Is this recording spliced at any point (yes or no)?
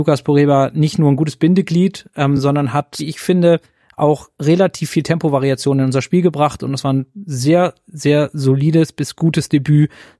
no